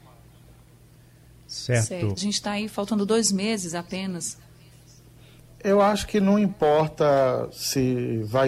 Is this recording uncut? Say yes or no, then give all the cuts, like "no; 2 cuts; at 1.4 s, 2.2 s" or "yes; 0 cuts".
no; 1 cut; at 2.2 s